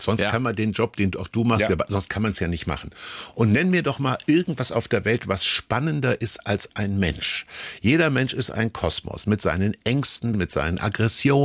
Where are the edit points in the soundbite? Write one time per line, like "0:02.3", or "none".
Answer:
0:10.3